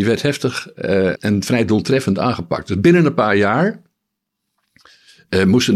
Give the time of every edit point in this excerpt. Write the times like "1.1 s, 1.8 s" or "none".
1.1 s